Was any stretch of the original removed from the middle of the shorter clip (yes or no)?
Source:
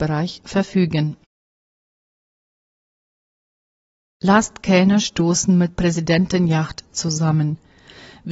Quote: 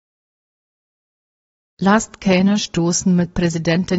no